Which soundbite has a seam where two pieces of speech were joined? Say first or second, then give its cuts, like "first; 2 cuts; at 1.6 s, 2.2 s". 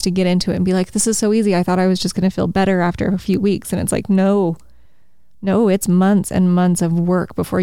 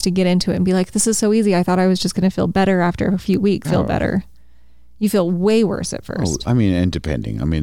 second; 1 cut; at 3.6 s